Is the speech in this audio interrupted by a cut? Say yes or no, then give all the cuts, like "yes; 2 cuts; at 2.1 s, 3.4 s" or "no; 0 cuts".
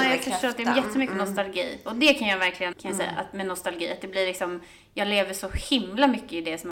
yes; 1 cut; at 2.7 s